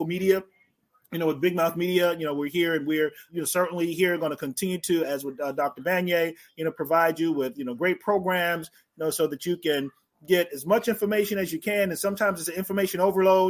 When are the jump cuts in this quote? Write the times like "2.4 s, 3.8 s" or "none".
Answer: 3.3 s